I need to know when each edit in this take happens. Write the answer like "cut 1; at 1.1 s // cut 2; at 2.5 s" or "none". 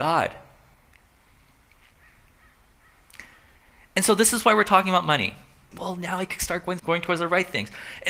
cut 1; at 5.7 s // cut 2; at 6.8 s